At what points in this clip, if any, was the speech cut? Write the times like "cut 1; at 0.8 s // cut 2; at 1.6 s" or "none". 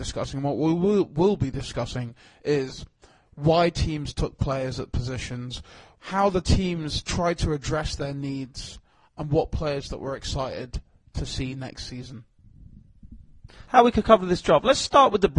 none